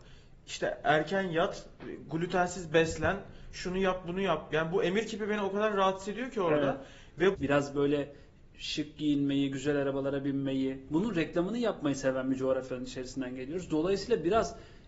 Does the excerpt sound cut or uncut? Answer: cut